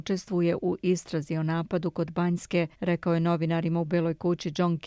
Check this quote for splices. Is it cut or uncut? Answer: cut